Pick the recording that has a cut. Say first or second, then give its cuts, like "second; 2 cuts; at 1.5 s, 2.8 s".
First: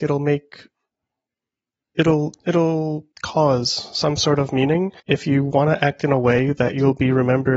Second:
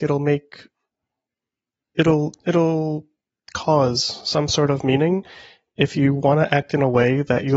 first; 2 cuts; at 3.1 s, 5.0 s